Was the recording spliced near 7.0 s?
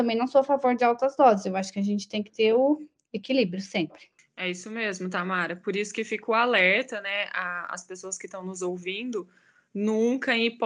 no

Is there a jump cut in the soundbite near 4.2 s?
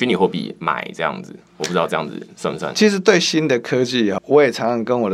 yes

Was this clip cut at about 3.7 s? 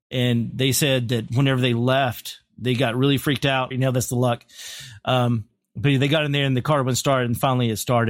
yes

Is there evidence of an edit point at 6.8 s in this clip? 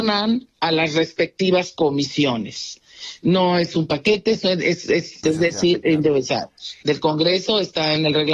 yes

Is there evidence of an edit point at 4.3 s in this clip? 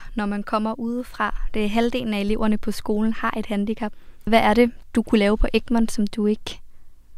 yes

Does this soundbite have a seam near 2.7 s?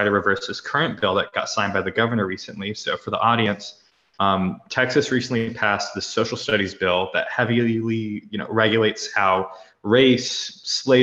no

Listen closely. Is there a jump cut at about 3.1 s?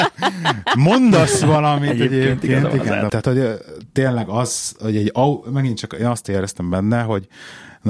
yes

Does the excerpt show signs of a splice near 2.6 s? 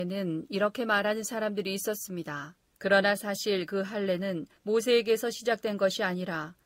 yes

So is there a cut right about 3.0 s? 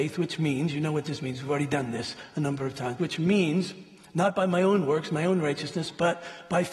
yes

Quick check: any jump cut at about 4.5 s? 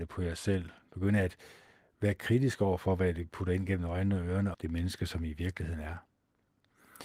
yes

